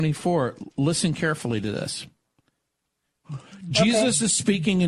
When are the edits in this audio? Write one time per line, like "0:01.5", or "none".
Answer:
0:03.2